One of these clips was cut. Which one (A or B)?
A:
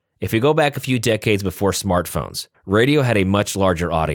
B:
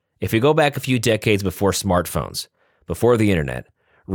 A